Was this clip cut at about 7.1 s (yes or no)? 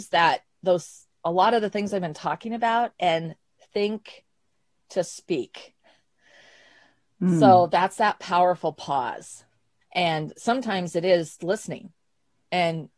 no